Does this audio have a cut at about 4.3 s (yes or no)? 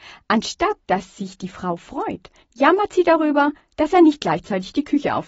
no